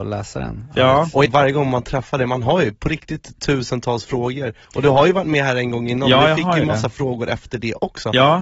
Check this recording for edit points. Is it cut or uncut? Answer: cut